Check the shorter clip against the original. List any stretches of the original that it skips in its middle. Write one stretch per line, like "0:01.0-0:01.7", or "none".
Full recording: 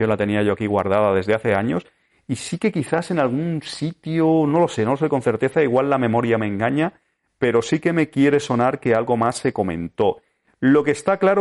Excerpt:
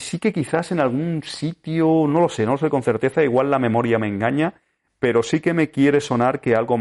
none